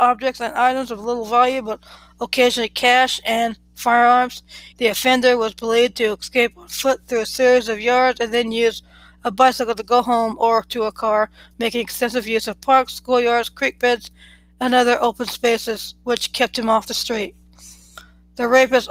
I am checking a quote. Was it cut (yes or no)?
yes